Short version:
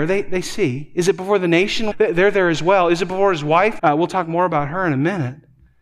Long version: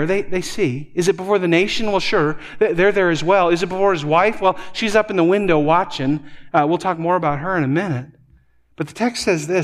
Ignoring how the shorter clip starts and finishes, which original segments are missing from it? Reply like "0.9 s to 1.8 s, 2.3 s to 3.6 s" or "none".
1.9 s to 2.5 s, 4.4 s to 6.5 s